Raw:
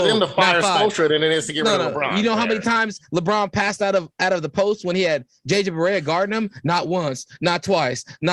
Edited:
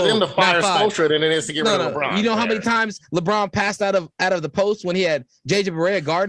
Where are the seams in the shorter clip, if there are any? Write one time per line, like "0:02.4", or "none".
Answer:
none